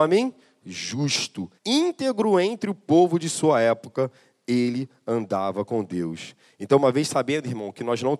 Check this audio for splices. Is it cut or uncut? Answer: cut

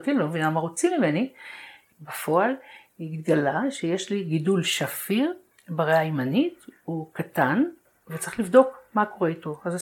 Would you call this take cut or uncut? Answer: uncut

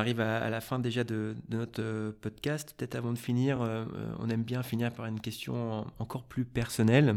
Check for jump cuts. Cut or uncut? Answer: uncut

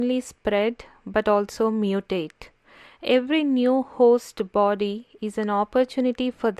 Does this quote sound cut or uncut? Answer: uncut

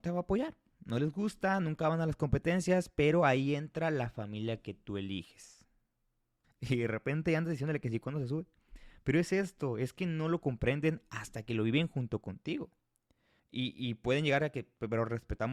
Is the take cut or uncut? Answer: cut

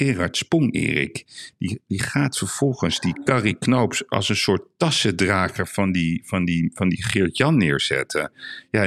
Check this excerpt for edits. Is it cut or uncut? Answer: uncut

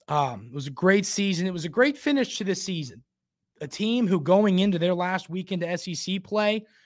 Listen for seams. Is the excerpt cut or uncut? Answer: uncut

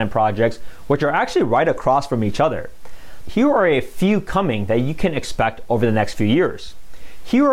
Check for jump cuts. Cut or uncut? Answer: cut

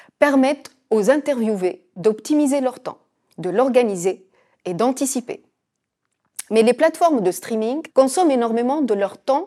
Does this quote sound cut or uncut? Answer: cut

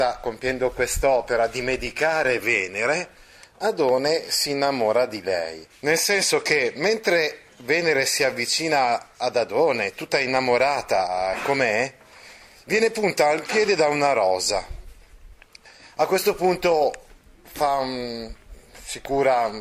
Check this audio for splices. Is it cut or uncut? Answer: cut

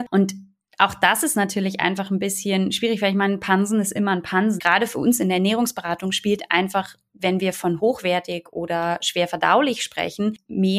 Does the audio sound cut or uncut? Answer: cut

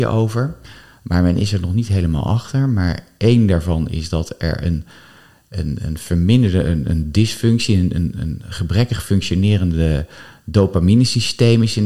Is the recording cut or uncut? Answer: uncut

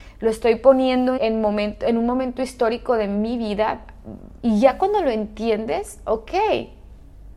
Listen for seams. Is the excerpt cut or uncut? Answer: cut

